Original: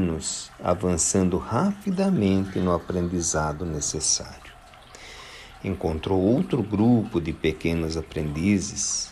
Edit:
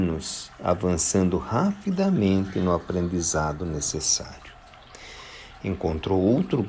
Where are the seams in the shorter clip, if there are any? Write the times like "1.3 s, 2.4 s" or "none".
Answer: none